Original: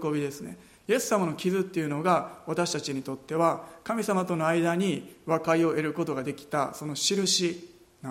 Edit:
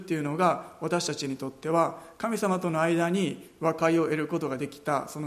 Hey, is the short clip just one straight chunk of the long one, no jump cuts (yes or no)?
yes